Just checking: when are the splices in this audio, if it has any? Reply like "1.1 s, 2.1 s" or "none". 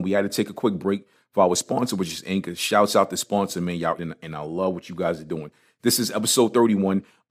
4.0 s